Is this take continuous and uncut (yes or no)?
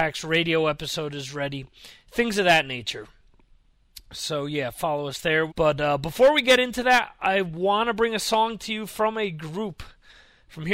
no